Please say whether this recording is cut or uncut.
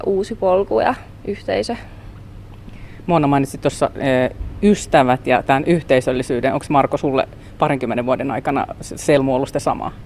uncut